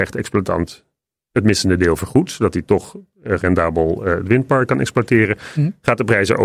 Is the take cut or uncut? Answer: cut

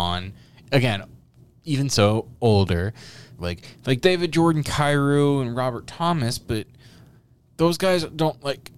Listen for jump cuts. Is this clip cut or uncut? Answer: cut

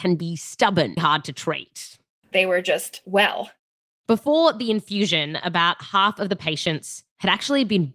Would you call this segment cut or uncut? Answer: cut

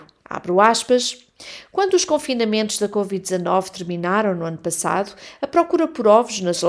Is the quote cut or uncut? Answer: uncut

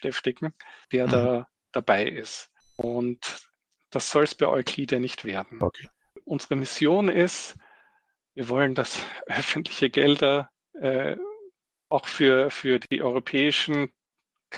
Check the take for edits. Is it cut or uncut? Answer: uncut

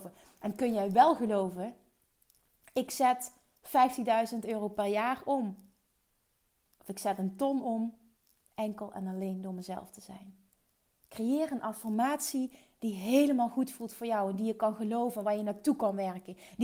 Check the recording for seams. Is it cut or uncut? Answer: uncut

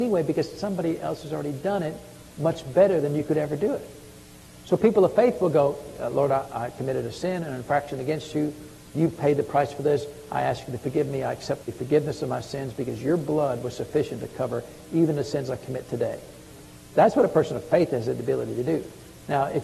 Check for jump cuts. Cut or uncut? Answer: cut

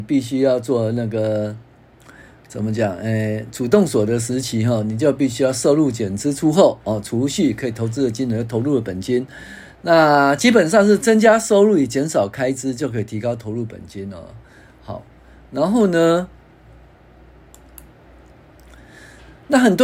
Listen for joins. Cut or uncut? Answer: uncut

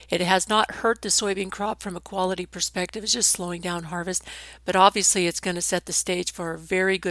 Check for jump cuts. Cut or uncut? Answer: uncut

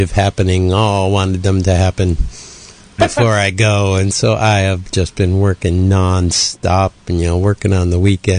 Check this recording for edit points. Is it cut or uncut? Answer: cut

